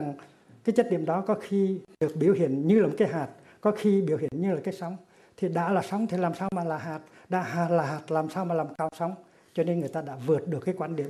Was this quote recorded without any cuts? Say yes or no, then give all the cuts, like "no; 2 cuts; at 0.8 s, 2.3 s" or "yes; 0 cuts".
yes; 0 cuts